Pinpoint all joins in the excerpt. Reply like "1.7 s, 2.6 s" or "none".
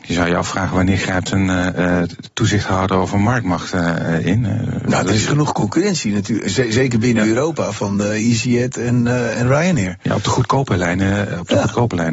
none